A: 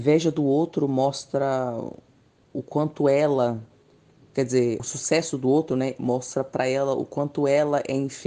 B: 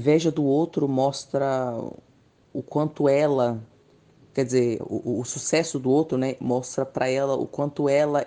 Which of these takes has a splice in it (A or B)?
A